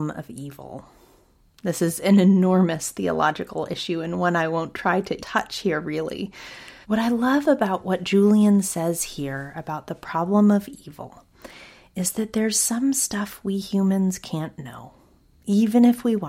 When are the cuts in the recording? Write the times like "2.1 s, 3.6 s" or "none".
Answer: 5.2 s, 6.8 s